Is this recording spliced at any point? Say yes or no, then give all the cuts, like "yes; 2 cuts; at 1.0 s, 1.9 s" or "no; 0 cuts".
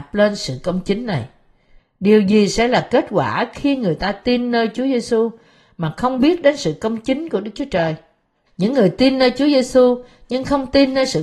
yes; 2 cuts; at 1.8 s, 8.5 s